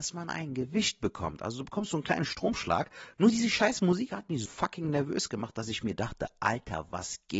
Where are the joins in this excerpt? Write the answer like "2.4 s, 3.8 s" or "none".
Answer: 3.1 s, 4.5 s